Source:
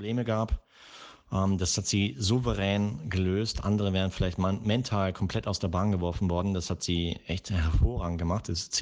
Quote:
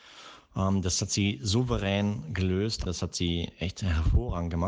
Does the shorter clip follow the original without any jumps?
no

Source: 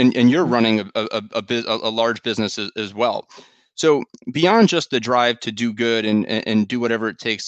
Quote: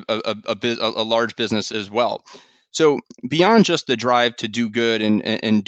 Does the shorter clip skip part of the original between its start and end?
yes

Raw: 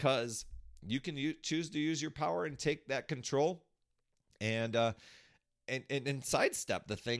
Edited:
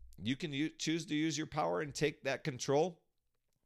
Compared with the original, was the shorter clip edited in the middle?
no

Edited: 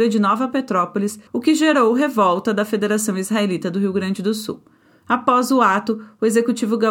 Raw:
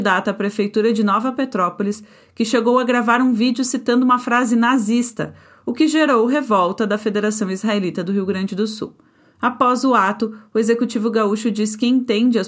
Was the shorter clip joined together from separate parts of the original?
yes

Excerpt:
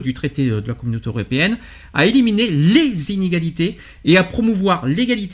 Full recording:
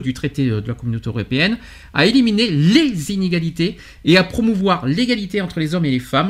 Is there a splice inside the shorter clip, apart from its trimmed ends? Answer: no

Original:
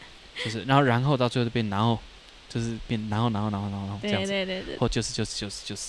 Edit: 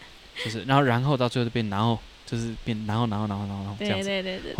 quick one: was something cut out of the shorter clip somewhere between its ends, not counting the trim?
yes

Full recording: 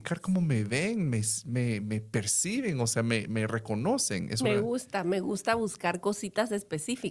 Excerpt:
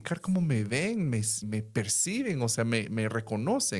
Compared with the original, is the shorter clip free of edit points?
no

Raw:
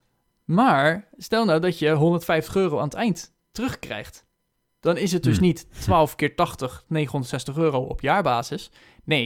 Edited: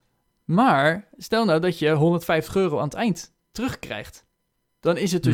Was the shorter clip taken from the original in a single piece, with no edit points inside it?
yes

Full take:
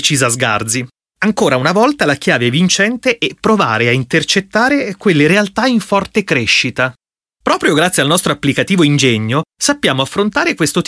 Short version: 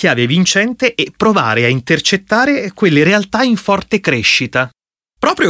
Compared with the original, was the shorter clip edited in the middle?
no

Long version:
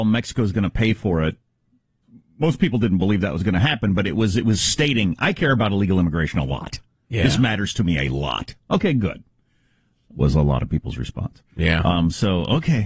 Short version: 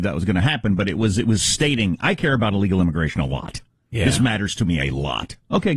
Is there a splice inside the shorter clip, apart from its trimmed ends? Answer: no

